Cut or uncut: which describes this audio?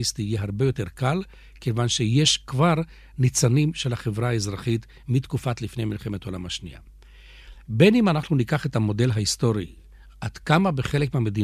uncut